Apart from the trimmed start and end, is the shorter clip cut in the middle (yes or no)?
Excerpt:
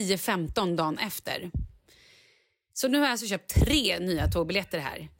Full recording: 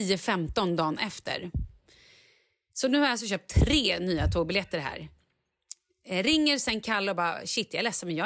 no